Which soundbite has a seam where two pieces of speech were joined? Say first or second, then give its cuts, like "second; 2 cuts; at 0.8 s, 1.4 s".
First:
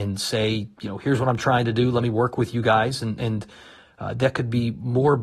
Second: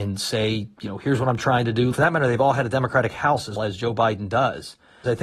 second; 2 cuts; at 1.9 s, 3.6 s